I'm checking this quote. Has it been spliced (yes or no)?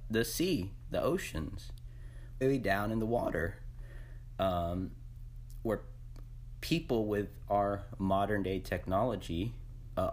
yes